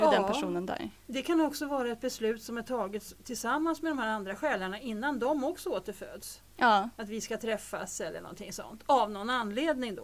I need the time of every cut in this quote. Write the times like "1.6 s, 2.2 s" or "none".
none